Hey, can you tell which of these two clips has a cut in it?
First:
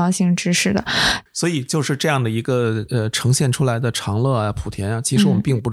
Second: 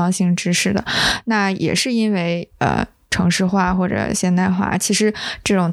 first; 1 cut; at 1.3 s

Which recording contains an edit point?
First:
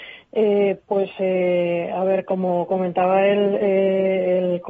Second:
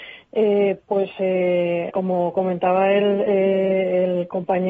second; 1 cut; at 1.9 s

